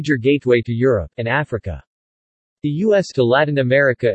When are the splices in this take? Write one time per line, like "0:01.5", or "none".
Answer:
0:01.1
0:03.1